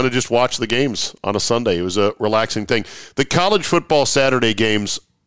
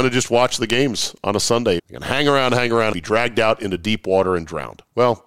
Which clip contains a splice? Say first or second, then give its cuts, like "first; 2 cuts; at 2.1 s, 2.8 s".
second; 2 cuts; at 1.8 s, 2.9 s